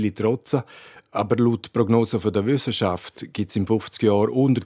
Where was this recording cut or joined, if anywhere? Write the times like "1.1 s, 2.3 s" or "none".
none